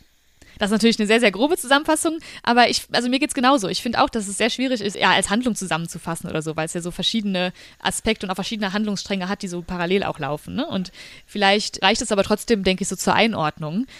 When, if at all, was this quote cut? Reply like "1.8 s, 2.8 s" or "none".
4.9 s